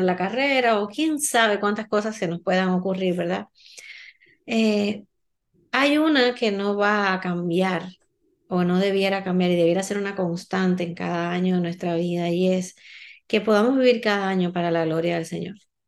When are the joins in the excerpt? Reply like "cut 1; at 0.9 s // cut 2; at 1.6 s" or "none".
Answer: none